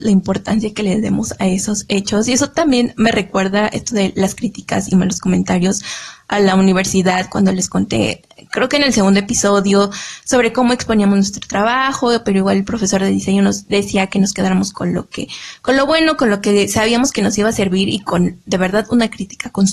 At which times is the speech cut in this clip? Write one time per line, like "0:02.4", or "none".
none